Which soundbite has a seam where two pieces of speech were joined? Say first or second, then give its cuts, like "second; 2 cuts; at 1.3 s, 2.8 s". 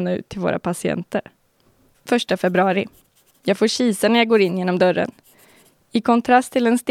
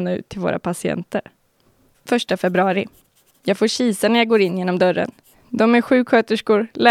second; 1 cut; at 5.3 s